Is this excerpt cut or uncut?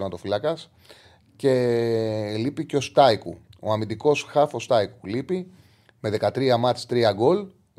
uncut